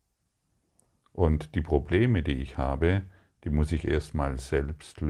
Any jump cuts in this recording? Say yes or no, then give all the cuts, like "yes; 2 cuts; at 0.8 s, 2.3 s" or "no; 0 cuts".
no; 0 cuts